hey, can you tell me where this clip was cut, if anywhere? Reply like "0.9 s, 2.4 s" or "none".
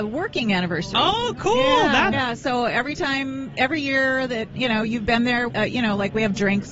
2.1 s, 5.5 s